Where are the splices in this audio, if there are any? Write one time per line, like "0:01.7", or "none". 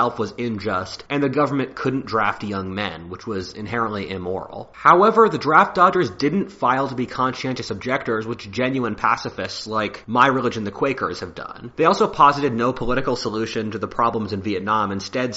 none

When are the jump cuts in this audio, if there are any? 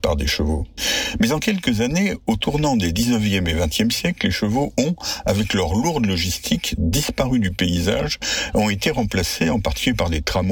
none

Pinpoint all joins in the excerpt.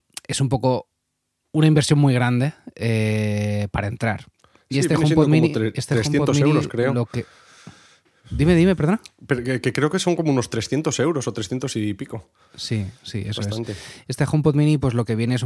none

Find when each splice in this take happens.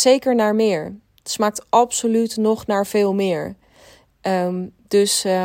none

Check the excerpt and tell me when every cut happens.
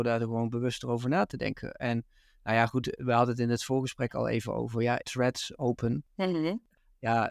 0:05.0

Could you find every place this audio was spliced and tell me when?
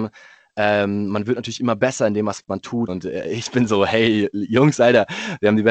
0:02.9

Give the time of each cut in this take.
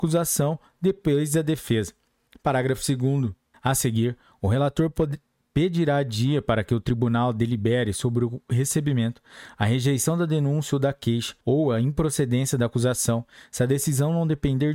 0:03.5
0:11.4

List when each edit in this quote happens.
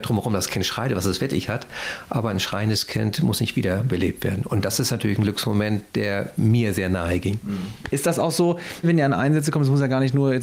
0:08.8

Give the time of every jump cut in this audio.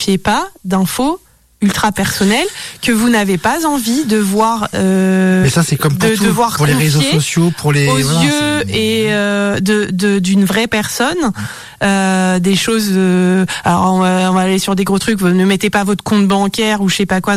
none

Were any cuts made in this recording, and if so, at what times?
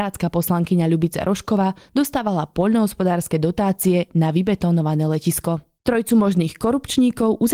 0:05.8

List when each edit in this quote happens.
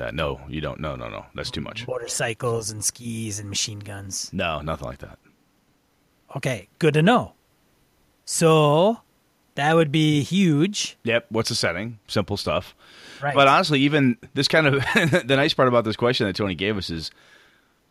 none

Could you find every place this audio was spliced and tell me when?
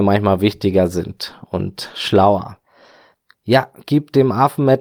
0:03.3

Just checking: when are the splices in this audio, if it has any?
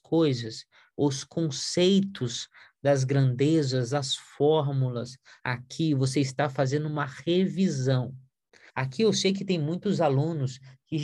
0:00.9
0:05.4
0:08.7

